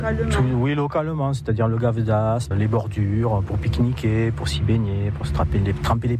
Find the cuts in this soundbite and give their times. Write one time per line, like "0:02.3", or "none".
0:02.5